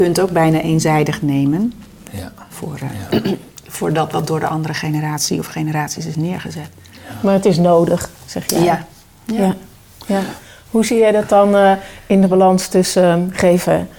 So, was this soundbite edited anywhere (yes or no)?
yes